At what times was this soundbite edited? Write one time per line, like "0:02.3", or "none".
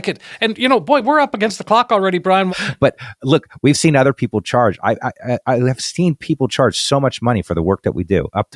0:02.5